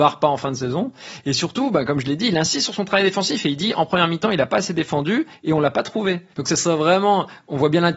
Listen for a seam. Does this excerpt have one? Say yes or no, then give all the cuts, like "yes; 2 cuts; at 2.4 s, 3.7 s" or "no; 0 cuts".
yes; 1 cut; at 6.3 s